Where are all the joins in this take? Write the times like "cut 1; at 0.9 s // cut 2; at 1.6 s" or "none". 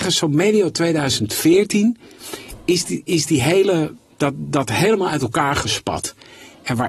none